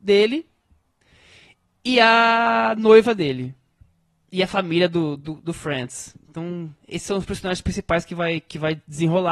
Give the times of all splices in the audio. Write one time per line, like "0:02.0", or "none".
none